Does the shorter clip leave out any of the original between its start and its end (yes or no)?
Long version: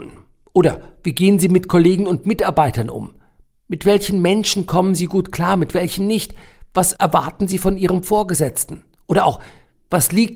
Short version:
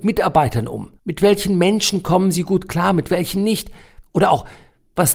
yes